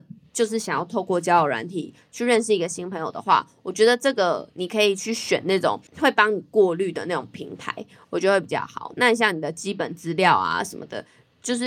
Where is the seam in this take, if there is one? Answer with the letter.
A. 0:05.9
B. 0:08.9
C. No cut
A